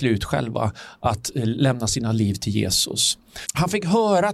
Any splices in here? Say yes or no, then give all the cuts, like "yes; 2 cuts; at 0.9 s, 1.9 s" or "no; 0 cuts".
yes; 1 cut; at 3.4 s